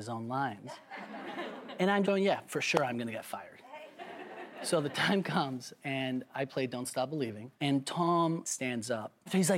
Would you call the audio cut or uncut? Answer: cut